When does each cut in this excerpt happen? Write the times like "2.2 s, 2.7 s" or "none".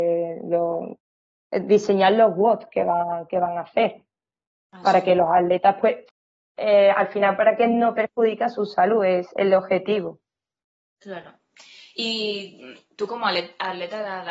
none